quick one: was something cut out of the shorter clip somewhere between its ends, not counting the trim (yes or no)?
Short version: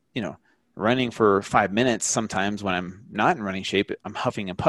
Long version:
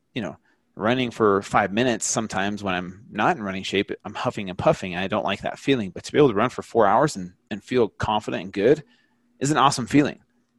no